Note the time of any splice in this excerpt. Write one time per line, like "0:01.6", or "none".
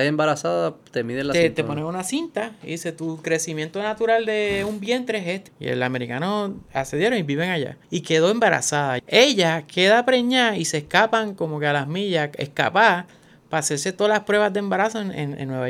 0:05.5
0:07.8
0:09.0